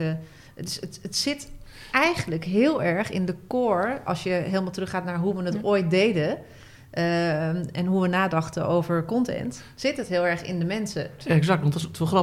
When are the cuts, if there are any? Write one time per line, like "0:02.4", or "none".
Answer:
0:04.1
0:11.2

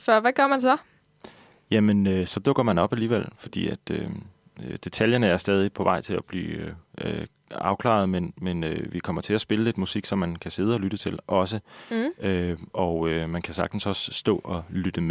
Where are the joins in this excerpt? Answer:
none

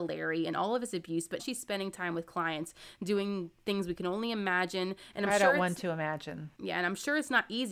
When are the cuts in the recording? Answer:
0:01.4

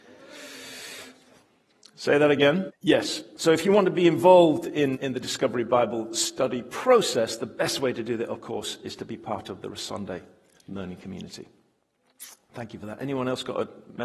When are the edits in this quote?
0:02.7
0:04.9

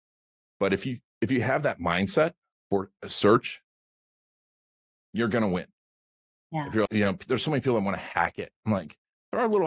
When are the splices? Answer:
0:06.9

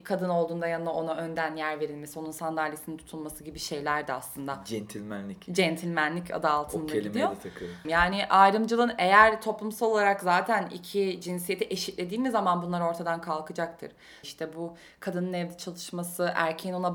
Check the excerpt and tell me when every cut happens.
0:07.8
0:14.2

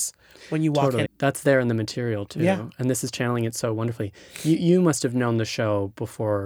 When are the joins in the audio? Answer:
0:01.1

